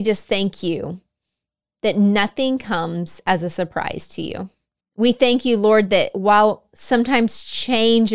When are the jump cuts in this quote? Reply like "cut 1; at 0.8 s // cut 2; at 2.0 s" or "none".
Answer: cut 1; at 4.8 s